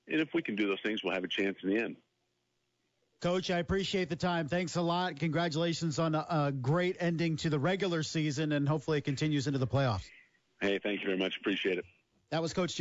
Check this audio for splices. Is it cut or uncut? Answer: uncut